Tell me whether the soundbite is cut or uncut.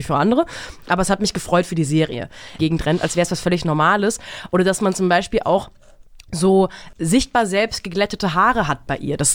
cut